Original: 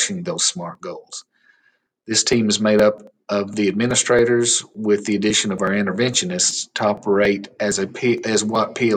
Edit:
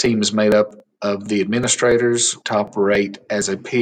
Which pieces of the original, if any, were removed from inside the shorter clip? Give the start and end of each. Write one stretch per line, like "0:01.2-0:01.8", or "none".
0:04.7-0:06.7